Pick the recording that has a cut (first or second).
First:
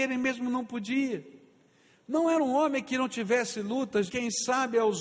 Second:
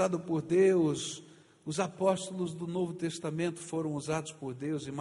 first